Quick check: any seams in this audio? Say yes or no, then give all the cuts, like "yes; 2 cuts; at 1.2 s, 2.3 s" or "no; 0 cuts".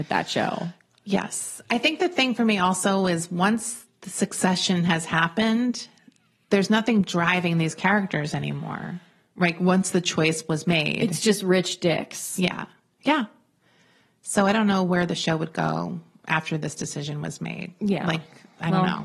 no; 0 cuts